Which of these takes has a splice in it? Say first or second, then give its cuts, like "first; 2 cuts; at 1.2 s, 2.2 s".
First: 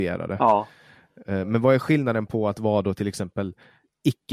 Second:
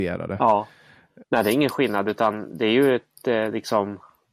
second; 1 cut; at 1.2 s